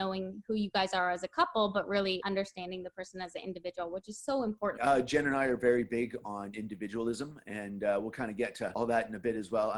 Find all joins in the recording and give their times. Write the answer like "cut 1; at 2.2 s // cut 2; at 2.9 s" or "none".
cut 1; at 4.8 s

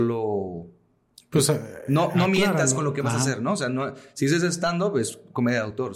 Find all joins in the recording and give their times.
none

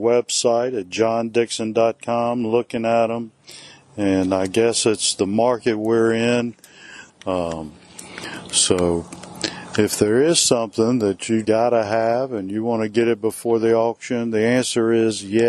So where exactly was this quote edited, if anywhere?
cut 1; at 7.1 s // cut 2; at 11.4 s

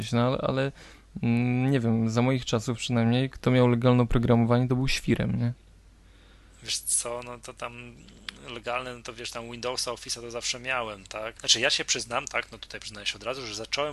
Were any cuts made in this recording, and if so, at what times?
cut 1; at 11.4 s

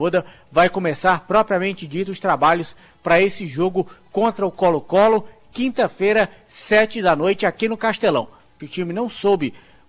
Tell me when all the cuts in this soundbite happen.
cut 1; at 8.6 s

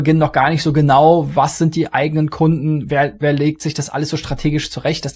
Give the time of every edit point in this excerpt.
none

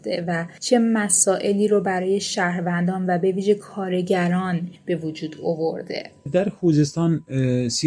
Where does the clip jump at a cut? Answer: cut 1; at 6.3 s

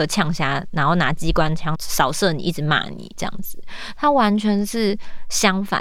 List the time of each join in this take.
cut 1; at 1.7 s

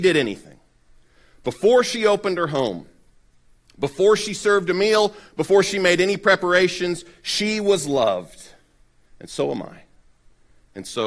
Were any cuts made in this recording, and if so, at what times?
none

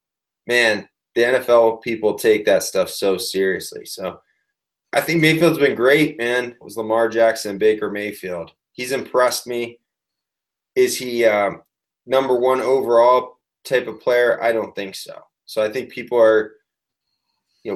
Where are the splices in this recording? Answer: cut 1; at 6.6 s

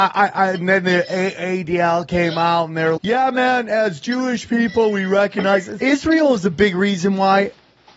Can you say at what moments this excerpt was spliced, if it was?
cut 1; at 3.0 s // cut 2; at 5.8 s

